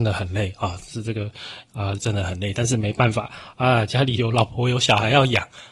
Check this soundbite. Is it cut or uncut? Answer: cut